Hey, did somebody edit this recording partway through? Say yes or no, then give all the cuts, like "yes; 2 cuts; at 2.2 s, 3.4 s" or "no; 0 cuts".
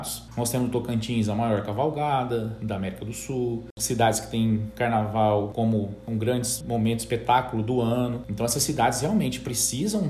no; 0 cuts